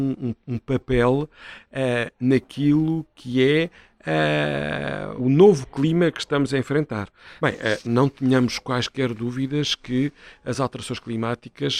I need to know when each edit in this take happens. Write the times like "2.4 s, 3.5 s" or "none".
5.2 s, 7.4 s